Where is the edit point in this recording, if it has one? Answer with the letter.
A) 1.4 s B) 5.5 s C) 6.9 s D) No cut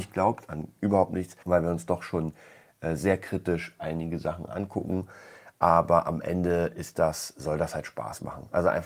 A